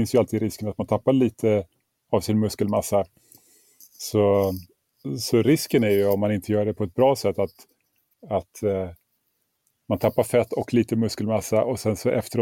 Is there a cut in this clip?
no; 0 cuts

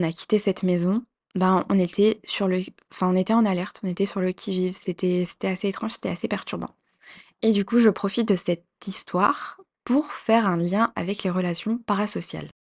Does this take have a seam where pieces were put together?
no; 0 cuts

